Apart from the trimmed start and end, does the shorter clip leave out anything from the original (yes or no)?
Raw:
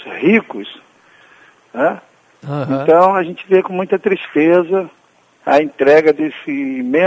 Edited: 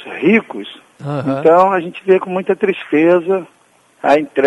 yes